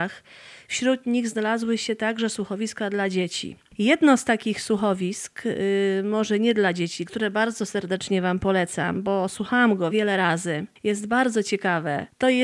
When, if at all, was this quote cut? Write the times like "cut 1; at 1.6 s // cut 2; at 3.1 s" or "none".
cut 1; at 7.1 s // cut 2; at 9.9 s